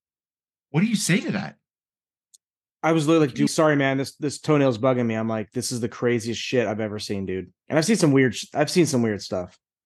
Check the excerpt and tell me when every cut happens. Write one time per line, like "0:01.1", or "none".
0:03.5
0:07.6